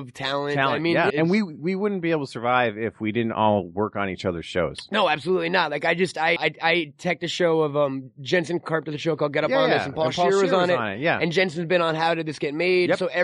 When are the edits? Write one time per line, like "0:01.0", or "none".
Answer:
0:01.1
0:06.4